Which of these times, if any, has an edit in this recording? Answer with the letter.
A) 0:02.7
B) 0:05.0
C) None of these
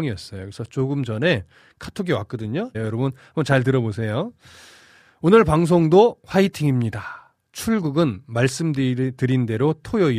A